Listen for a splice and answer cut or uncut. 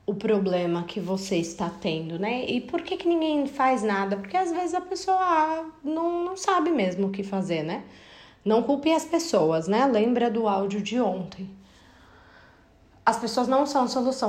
uncut